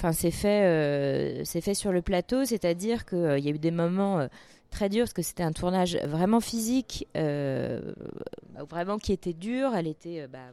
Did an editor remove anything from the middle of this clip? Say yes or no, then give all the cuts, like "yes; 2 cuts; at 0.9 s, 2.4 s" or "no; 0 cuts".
no; 0 cuts